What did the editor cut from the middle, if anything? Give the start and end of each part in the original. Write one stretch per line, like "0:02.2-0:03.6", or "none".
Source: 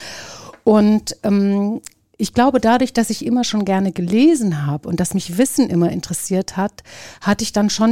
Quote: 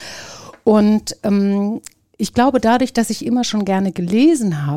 none